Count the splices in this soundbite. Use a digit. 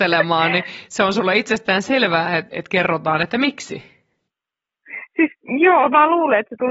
1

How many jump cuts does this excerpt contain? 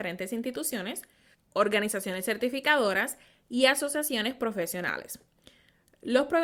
1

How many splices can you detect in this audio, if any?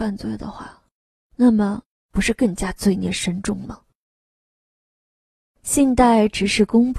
1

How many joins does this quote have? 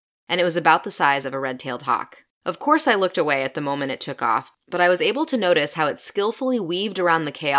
1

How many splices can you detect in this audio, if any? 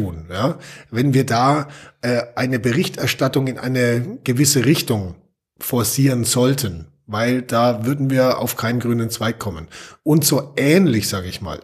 0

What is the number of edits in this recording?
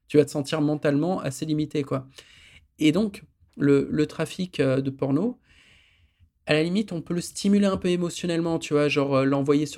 0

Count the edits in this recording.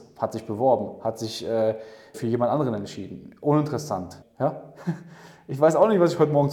2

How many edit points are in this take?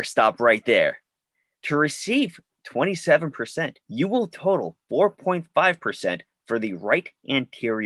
2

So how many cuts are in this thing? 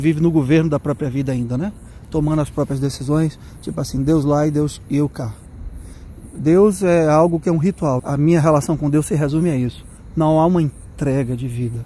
1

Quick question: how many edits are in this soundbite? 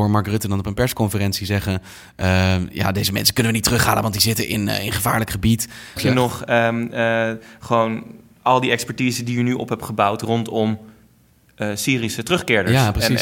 1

